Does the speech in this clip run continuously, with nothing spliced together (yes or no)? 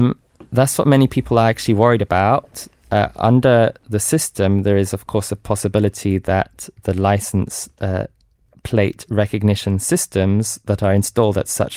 yes